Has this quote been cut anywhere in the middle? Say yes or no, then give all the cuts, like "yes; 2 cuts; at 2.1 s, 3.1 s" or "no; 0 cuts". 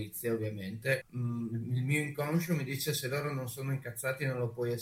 yes; 1 cut; at 1.0 s